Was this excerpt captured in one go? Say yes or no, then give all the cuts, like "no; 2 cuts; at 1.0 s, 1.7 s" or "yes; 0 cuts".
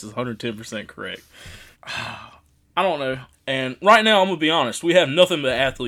no; 2 cuts; at 1.7 s, 3.3 s